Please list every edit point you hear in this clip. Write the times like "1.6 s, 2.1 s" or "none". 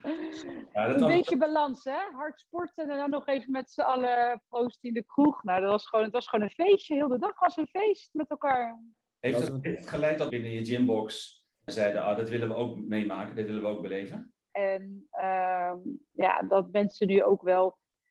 10.3 s, 11.7 s, 14.5 s